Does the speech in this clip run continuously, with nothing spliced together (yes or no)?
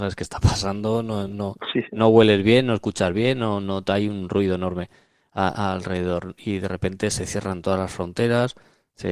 yes